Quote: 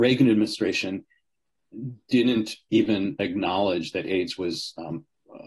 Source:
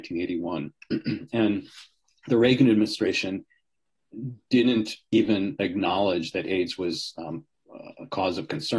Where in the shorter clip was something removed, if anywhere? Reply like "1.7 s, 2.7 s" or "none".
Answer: none